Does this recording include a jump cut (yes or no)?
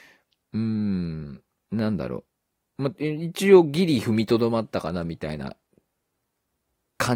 yes